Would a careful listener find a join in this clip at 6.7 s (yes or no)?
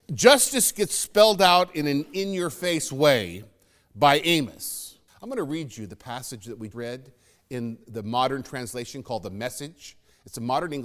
yes